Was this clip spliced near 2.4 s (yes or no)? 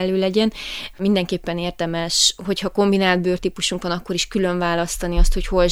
no